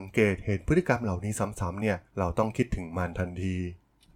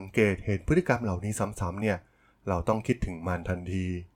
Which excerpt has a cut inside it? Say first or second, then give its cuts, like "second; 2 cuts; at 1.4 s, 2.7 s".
first; 1 cut; at 2.1 s